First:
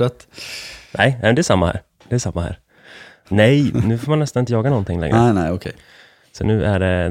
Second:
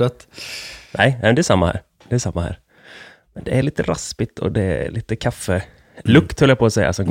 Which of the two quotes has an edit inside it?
first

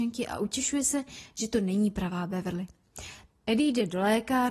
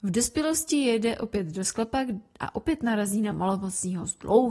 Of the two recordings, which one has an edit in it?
first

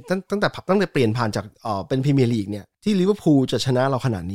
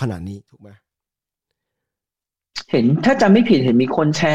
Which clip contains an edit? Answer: first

